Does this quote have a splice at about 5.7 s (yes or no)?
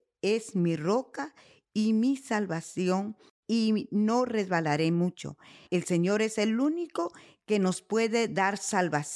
yes